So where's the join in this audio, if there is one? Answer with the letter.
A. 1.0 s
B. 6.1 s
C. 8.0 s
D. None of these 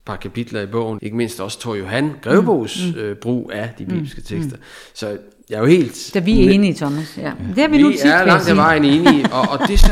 A